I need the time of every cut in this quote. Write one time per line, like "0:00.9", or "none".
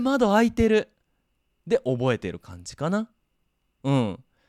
none